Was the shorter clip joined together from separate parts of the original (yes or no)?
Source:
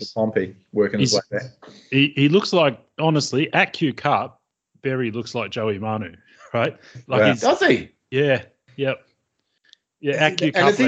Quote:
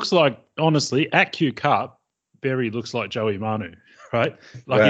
no